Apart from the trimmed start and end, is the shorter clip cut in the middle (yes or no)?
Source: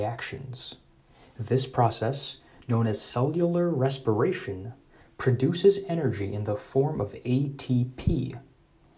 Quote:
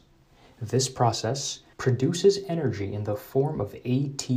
yes